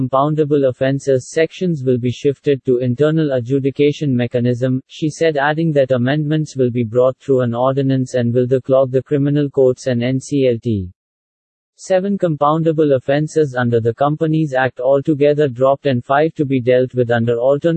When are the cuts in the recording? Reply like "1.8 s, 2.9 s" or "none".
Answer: 4.8 s